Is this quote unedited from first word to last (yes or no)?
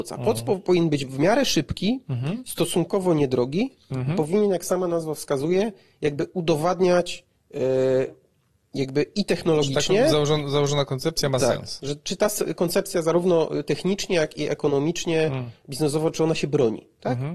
yes